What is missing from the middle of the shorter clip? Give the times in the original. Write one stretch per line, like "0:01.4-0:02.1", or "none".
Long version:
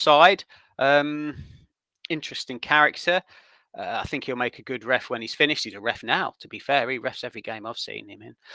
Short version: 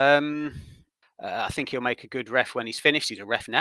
0:01.9-0:03.6